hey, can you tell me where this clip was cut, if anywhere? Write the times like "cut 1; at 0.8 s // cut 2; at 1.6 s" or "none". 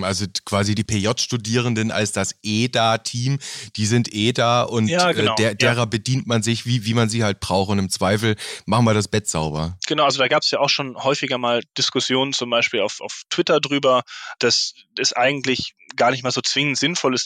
none